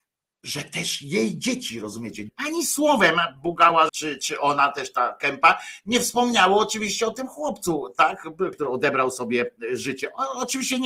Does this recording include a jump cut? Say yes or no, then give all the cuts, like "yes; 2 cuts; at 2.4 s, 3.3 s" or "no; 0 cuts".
yes; 3 cuts; at 2.3 s, 3.9 s, 8.5 s